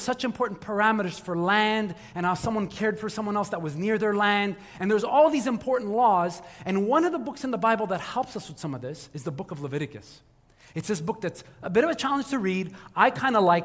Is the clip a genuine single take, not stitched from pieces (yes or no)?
yes